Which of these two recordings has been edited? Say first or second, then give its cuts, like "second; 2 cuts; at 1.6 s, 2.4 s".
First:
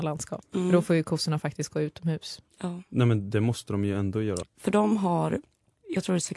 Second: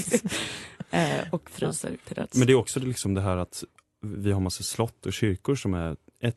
first; 1 cut; at 4.4 s